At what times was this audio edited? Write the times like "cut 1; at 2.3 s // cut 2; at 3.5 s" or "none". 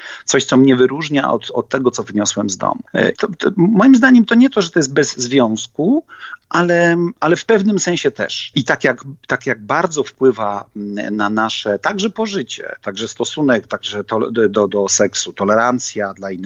cut 1; at 3.1 s // cut 2; at 8.5 s // cut 3; at 14.7 s